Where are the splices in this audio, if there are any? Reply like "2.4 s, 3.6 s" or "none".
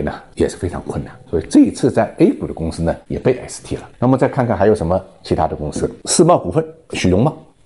none